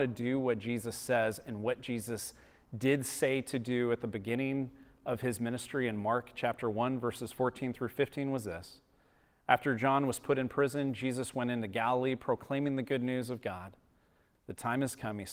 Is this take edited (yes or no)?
no